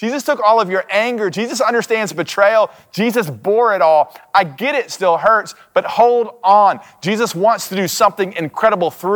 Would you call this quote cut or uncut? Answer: uncut